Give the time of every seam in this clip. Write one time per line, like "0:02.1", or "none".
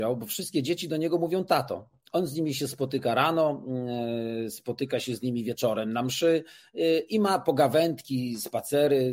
none